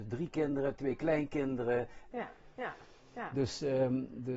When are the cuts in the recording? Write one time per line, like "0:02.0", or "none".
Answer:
0:02.1